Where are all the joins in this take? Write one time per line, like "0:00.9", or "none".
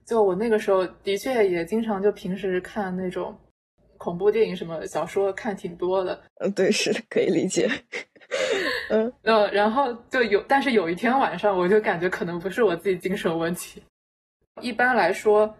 0:06.3
0:14.4